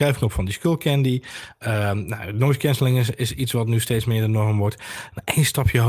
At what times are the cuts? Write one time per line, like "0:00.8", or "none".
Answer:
none